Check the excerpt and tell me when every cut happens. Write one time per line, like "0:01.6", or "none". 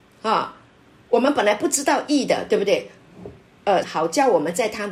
0:03.8

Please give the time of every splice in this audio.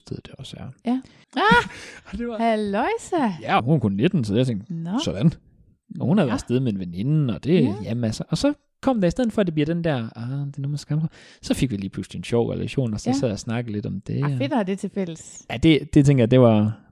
0:01.2
0:03.6

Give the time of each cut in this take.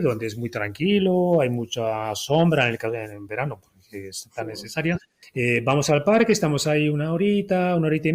0:05.2

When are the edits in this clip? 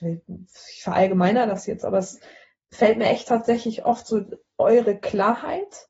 none

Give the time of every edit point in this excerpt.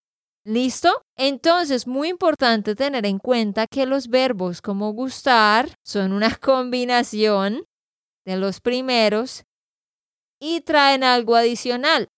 0:01.1
0:05.8

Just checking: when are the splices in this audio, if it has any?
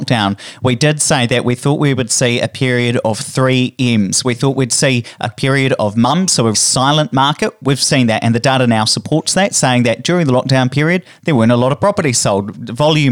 0:06.5

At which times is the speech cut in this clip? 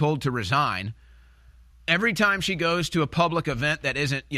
0:01.7

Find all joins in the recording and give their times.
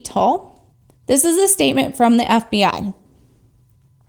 0:00.9

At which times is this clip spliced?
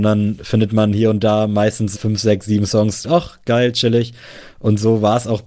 0:01.9
0:03.0

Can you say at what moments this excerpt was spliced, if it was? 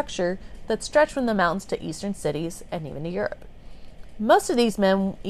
none

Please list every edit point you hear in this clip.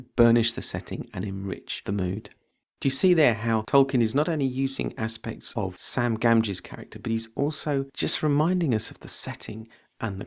0:02.6

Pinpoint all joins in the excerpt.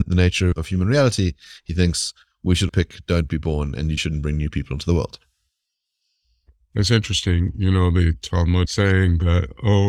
0:02.7
0:04.0

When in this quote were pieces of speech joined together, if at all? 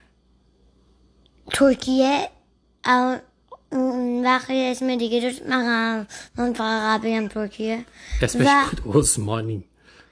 none

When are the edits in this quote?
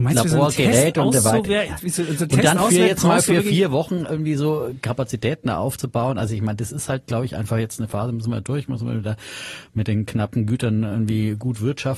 none

